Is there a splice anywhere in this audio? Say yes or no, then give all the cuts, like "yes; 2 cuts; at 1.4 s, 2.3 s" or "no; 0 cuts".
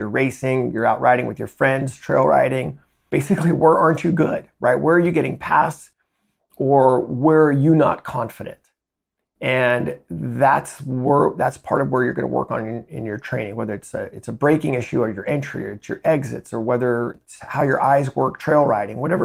no; 0 cuts